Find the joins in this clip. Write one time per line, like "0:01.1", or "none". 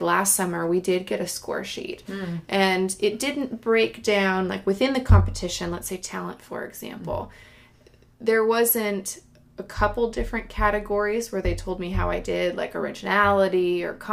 none

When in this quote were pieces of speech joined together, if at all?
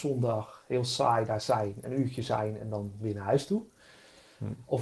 none

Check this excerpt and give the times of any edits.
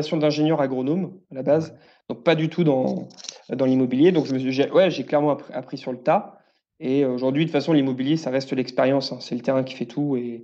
none

